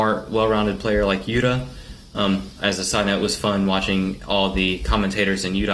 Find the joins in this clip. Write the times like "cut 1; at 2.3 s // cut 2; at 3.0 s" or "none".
cut 1; at 2.6 s